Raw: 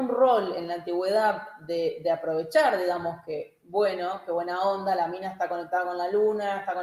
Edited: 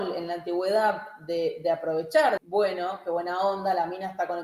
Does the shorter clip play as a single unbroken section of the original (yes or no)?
no